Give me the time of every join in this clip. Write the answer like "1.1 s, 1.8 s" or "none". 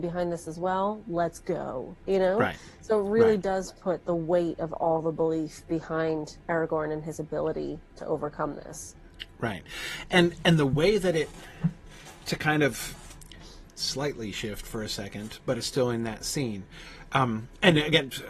13.7 s